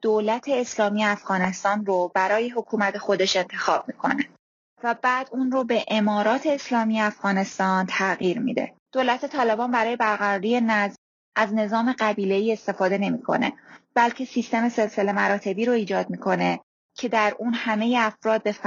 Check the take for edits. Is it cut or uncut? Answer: cut